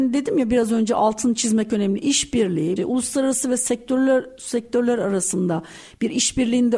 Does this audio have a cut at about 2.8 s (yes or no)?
yes